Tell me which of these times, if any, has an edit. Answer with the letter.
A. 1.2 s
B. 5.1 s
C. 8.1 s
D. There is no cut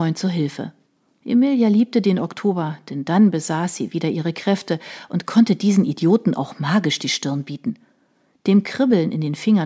A